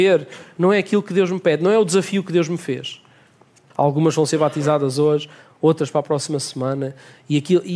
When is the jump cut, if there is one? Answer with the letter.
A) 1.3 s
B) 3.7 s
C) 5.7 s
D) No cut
B